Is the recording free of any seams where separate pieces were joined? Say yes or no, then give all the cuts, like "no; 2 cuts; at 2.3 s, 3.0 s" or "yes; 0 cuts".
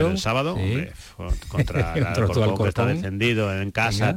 yes; 0 cuts